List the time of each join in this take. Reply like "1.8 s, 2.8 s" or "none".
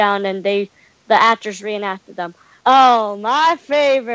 2.6 s